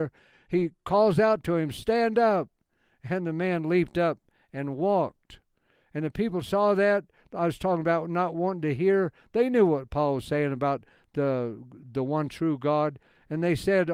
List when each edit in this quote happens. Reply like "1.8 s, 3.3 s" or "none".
none